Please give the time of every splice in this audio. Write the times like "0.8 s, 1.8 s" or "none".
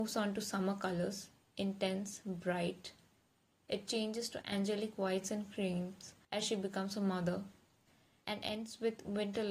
none